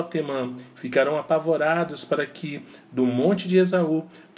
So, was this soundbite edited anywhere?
no; 0 cuts

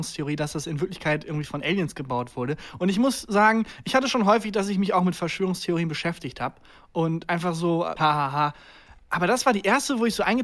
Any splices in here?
yes; 1 cut; at 8.0 s

